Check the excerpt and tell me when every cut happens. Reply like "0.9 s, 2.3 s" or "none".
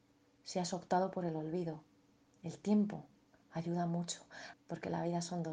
4.5 s

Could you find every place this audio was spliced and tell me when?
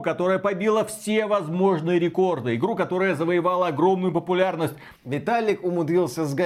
5.0 s

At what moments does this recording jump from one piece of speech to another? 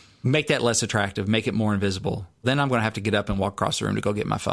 none

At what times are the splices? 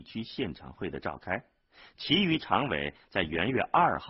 none

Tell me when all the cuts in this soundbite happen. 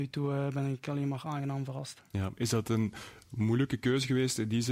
none

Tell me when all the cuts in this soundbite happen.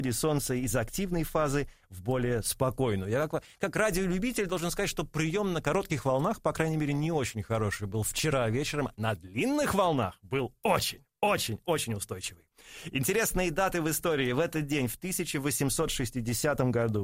none

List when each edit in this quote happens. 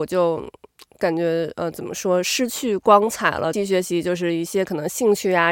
3.5 s

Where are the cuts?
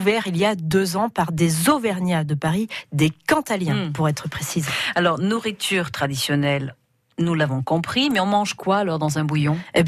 none

